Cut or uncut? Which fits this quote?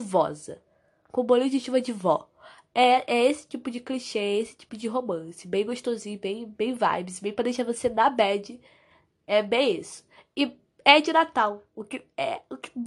uncut